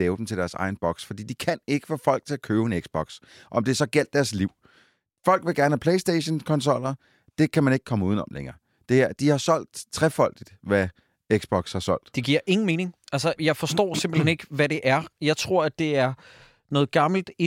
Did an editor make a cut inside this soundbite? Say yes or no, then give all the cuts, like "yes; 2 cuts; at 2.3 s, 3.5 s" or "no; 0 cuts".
yes; 1 cut; at 13.4 s